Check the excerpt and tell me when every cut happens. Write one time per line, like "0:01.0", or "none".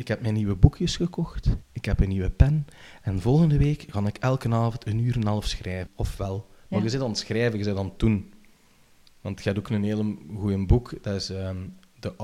0:05.9